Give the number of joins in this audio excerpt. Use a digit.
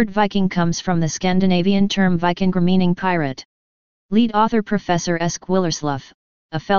1